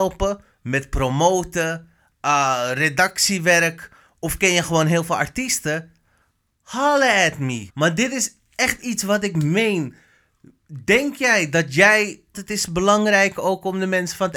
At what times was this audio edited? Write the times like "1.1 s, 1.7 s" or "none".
7.7 s, 12.3 s